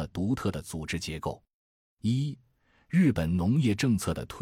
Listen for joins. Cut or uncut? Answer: uncut